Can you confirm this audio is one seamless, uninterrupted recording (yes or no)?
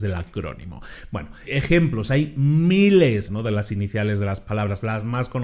no